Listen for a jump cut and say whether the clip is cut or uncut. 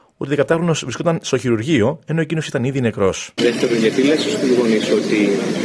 cut